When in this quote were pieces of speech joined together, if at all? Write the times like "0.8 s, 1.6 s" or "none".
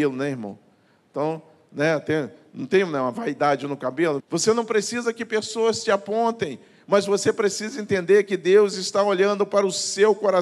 4.2 s